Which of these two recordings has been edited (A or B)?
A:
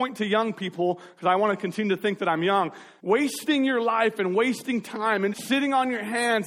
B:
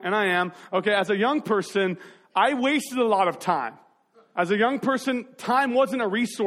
A